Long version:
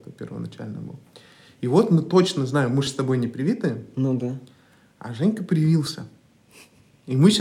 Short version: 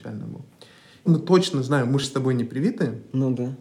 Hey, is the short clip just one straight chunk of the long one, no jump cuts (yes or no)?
no